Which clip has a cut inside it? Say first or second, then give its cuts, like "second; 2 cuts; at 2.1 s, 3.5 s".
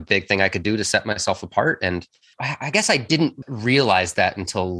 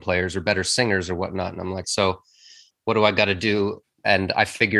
second; 2 cuts; at 1.8 s, 3.8 s